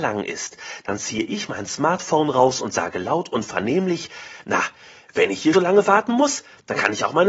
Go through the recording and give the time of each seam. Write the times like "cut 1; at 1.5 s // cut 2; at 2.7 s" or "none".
cut 1; at 5.5 s